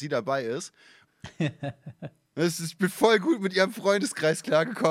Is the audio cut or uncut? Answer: cut